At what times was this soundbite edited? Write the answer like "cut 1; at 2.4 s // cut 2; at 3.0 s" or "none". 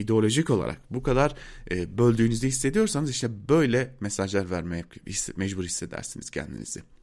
none